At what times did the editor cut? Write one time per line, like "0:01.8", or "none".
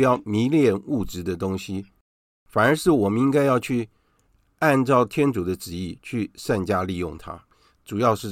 none